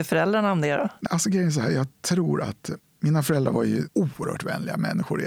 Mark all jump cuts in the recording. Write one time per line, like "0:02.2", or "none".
0:01.1